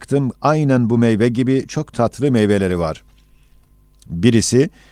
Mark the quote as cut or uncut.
uncut